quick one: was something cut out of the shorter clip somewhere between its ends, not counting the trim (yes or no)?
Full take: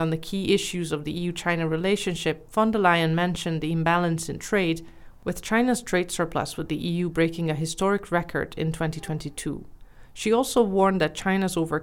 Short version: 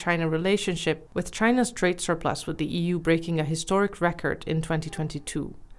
yes